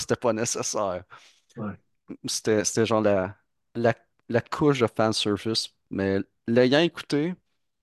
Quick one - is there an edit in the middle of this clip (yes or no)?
no